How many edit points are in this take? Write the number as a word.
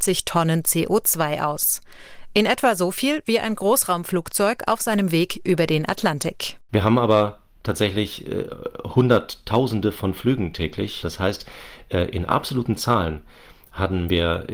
one